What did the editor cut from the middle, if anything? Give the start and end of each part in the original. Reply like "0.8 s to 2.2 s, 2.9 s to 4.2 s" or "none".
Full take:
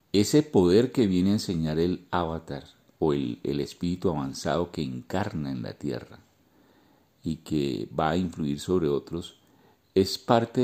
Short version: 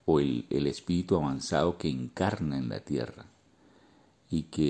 none